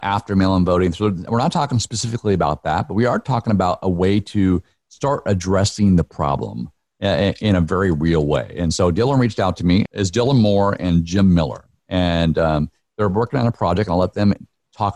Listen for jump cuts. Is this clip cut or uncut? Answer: cut